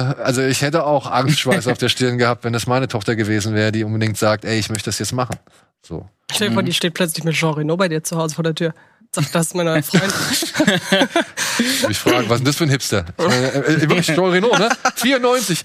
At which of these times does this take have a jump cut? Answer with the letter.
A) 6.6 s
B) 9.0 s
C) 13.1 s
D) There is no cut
D